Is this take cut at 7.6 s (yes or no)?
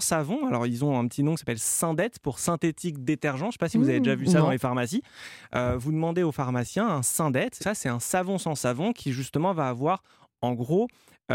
yes